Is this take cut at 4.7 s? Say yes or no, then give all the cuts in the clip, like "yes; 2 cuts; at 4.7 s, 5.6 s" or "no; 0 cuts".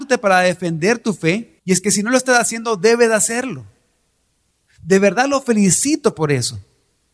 yes; 2 cuts; at 1.6 s, 4.7 s